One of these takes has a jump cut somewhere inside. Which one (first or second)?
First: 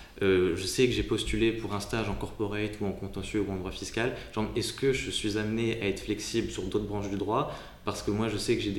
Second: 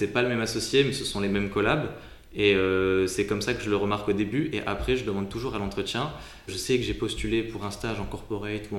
second